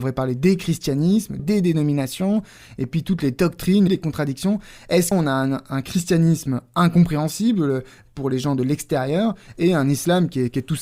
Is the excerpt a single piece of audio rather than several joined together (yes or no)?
no